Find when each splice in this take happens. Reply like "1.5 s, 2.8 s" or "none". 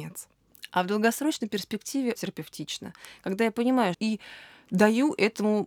2.2 s, 3.9 s